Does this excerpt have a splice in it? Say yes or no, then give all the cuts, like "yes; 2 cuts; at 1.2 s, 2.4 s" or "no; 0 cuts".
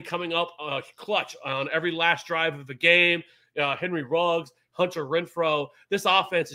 no; 0 cuts